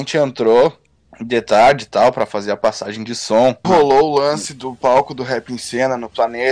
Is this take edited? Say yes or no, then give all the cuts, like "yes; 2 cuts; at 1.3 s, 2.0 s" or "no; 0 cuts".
yes; 1 cut; at 3.6 s